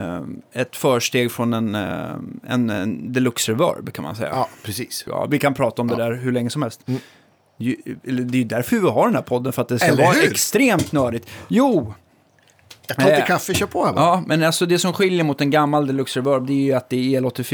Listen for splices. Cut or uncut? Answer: cut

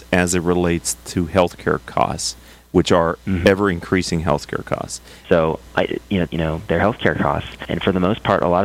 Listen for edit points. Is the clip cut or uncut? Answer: cut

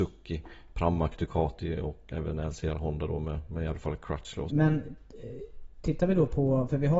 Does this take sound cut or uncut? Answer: cut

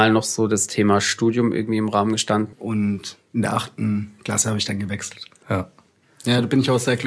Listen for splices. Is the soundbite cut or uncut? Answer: cut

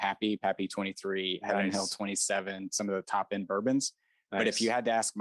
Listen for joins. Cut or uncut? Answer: uncut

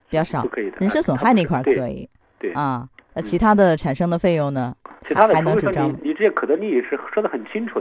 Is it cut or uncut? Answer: cut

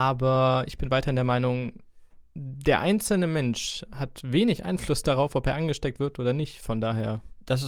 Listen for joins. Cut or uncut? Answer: uncut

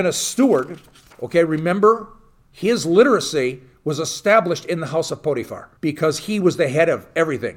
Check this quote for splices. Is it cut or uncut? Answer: cut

